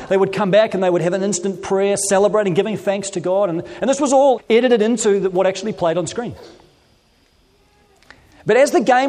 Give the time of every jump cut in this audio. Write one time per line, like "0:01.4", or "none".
0:04.4